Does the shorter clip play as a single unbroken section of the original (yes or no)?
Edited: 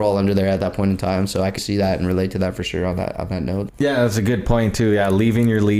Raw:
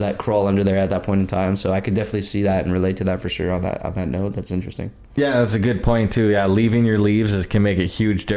no